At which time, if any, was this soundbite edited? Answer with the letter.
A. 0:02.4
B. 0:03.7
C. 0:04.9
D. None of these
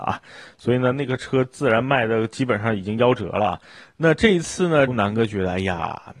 C